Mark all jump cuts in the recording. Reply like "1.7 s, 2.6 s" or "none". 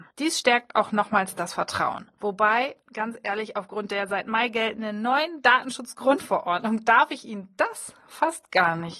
2.2 s